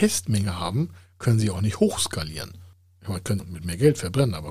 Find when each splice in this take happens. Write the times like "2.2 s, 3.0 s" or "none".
3.4 s

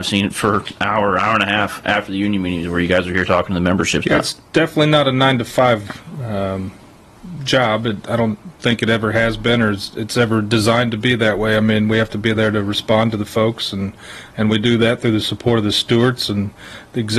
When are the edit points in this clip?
4.0 s

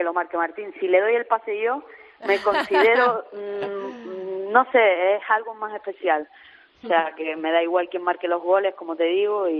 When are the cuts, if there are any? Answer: none

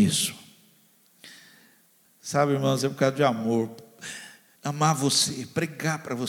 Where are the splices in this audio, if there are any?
2.0 s, 4.6 s

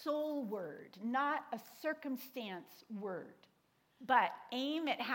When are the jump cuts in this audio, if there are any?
4.0 s

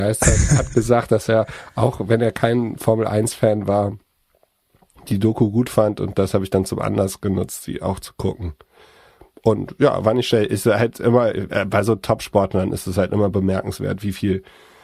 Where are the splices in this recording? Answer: none

